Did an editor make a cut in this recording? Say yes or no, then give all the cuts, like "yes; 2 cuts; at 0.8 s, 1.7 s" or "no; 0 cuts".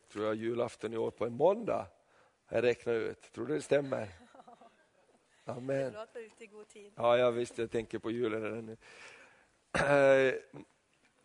no; 0 cuts